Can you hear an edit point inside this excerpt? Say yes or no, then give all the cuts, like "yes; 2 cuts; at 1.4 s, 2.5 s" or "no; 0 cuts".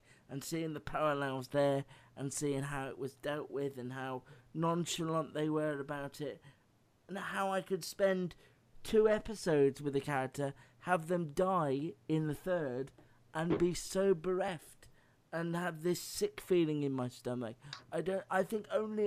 no; 0 cuts